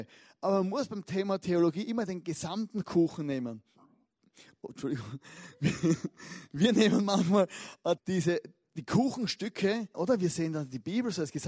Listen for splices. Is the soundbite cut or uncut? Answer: cut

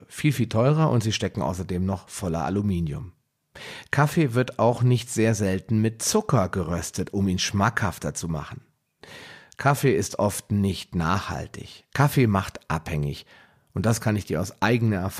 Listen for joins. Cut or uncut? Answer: cut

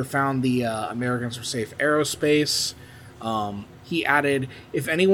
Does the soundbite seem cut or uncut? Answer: uncut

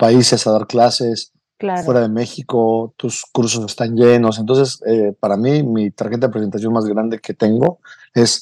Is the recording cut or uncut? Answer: uncut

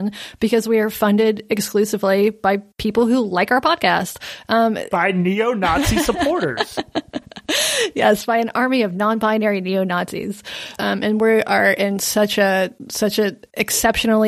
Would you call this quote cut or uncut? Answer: cut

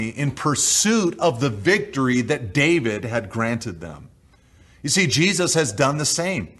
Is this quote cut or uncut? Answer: uncut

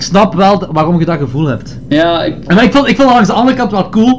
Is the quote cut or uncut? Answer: uncut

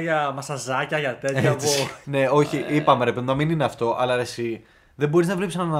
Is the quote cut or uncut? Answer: cut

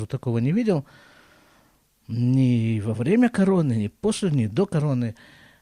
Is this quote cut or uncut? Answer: uncut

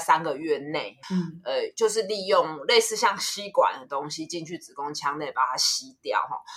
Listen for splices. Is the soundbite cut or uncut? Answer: cut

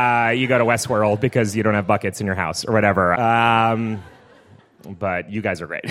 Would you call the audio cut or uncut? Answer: cut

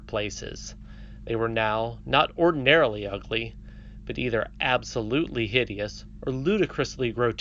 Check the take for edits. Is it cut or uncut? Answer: uncut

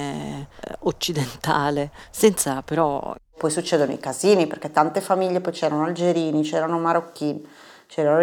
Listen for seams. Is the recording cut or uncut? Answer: cut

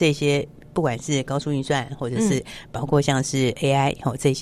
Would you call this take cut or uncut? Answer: uncut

